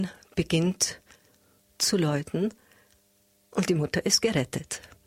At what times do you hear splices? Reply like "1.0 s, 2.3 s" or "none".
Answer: none